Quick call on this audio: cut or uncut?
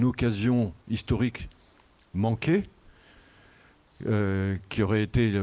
uncut